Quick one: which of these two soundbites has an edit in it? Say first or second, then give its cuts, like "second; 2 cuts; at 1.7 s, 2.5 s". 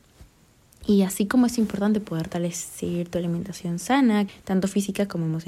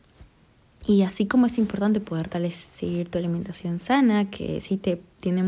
first; 1 cut; at 4.3 s